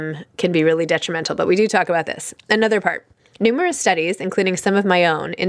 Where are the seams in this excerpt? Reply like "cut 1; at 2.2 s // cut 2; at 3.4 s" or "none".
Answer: none